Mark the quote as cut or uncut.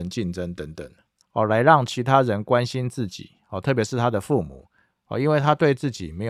cut